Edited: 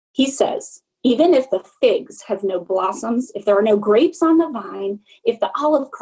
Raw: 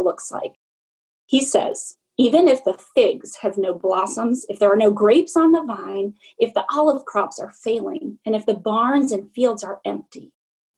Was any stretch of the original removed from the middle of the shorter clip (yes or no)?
no